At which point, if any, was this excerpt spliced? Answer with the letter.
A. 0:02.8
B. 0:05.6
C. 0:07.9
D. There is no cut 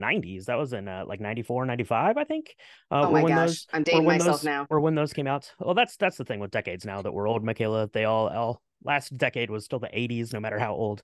D